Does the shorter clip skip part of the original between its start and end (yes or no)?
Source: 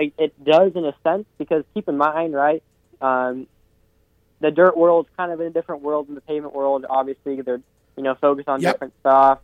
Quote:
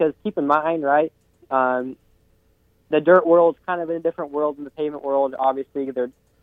no